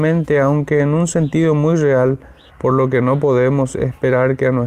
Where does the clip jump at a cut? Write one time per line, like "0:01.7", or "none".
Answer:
0:02.5